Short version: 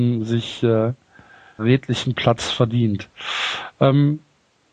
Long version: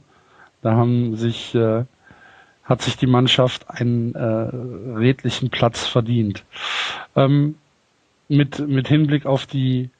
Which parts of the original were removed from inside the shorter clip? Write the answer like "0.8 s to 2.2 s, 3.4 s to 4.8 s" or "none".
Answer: 2.5 s to 4.9 s